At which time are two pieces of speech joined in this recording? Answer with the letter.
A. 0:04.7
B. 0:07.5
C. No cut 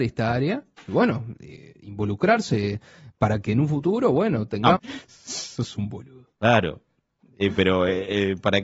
A